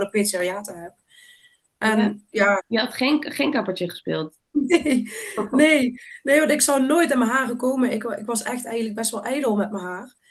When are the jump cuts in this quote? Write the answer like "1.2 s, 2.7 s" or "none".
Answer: 2.6 s